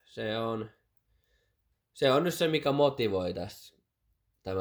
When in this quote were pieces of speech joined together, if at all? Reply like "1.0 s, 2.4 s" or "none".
none